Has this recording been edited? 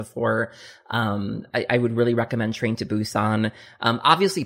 no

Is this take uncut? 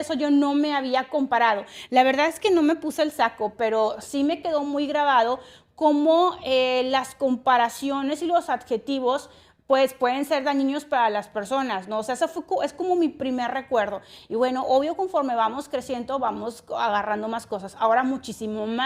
yes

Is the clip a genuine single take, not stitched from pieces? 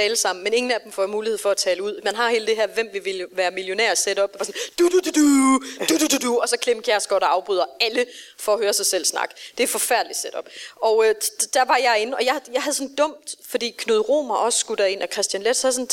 yes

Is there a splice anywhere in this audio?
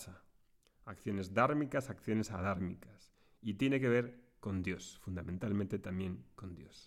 no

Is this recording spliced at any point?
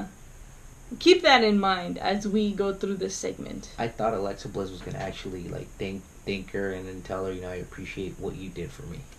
no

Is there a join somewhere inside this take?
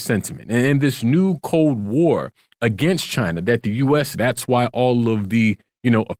yes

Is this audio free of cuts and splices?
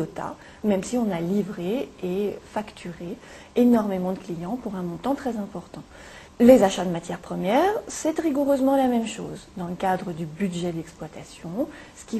no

